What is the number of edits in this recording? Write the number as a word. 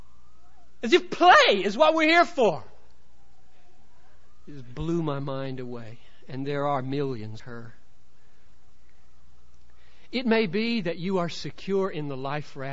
one